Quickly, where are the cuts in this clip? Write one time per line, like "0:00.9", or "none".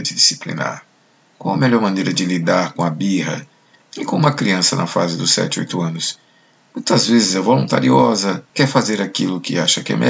0:03.8
0:08.5